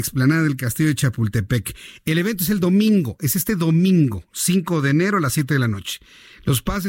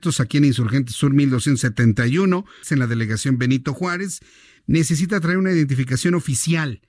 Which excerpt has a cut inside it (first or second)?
second